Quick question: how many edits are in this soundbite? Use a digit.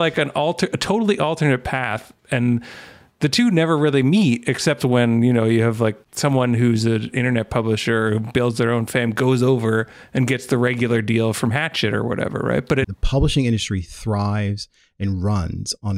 1